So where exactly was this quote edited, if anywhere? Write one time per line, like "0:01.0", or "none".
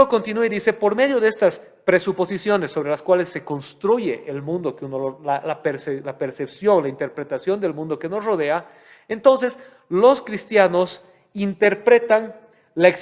none